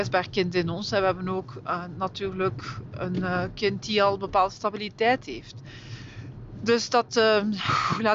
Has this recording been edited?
no; 0 cuts

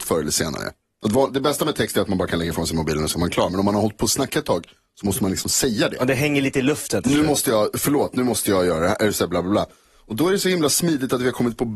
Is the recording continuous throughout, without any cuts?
yes; 0 cuts

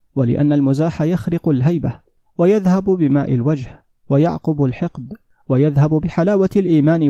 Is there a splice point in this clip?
no; 0 cuts

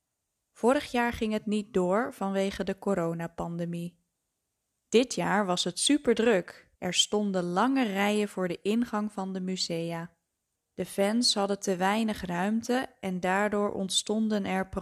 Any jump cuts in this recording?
yes; 2 cuts; at 6.7 s, 10.5 s

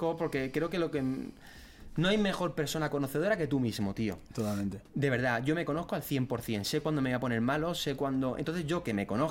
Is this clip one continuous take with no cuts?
yes; 0 cuts

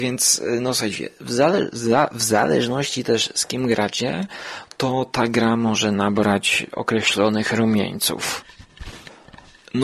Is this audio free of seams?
yes; 0 cuts

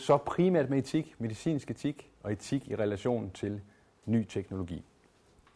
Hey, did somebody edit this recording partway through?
no; 0 cuts

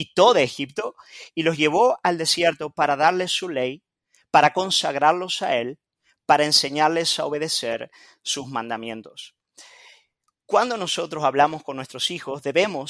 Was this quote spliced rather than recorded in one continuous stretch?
no; 0 cuts

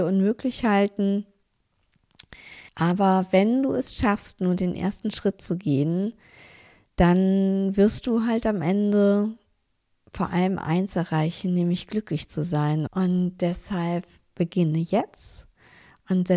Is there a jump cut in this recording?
yes; 2 cuts; at 2.7 s, 12.9 s

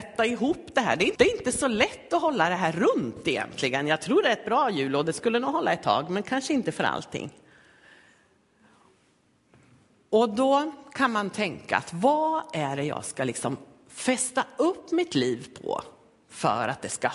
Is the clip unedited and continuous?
no; 1 cut; at 1.2 s

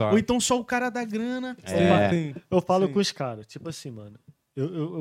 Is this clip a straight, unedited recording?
yes; 0 cuts

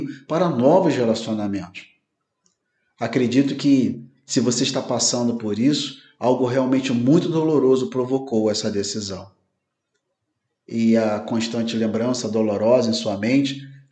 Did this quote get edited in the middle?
no; 0 cuts

